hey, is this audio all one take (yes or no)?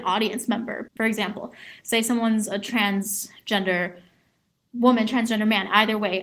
yes